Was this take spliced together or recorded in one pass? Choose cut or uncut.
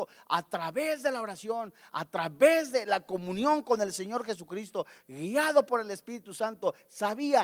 uncut